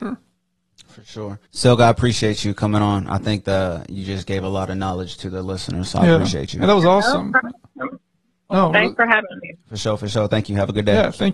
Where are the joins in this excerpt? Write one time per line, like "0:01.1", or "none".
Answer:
0:01.5